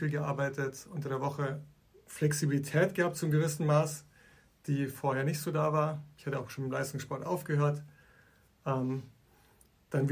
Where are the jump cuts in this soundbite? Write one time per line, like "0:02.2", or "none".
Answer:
none